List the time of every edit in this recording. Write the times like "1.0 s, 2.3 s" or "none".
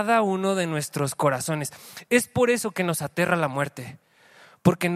none